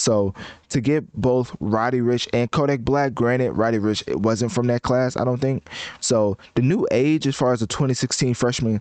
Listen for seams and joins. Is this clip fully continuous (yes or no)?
no